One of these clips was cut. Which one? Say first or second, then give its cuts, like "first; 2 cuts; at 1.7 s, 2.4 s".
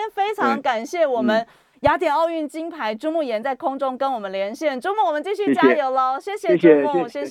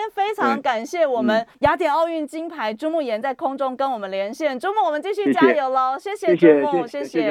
second; 1 cut; at 1.5 s